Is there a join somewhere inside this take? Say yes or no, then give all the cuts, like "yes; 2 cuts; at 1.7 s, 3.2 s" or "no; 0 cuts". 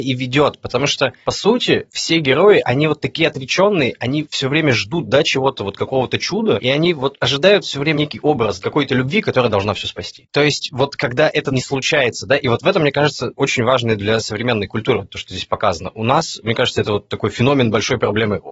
yes; 1 cut; at 10.3 s